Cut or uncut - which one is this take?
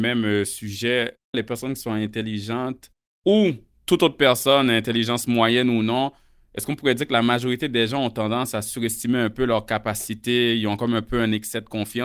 cut